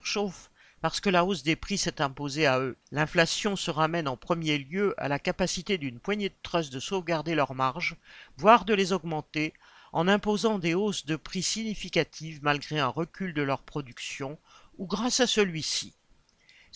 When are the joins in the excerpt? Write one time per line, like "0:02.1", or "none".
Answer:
0:02.8

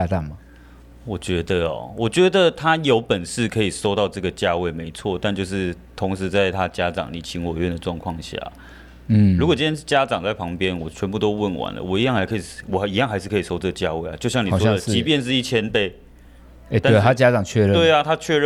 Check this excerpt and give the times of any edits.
none

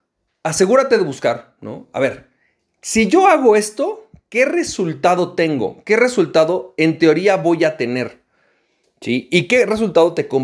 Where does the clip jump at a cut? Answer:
none

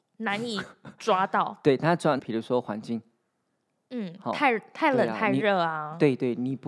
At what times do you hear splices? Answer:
0:02.2

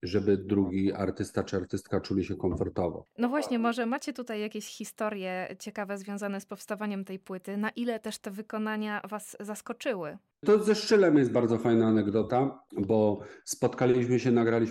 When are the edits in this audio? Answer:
0:03.1

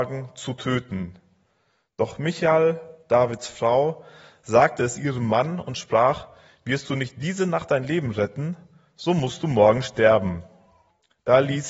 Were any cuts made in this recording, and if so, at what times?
none

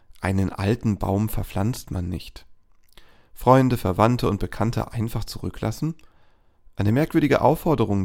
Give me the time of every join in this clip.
none

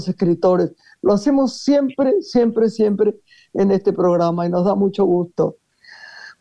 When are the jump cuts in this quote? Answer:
none

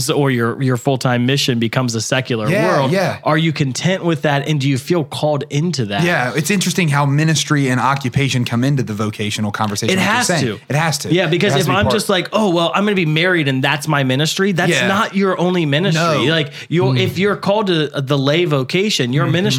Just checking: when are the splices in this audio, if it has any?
none

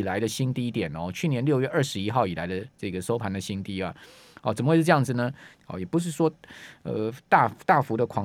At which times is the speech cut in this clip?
0:05.6

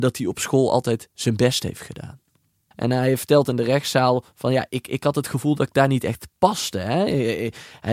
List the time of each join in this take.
0:02.7

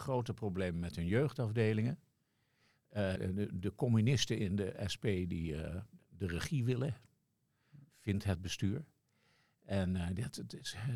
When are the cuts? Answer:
0:03.2

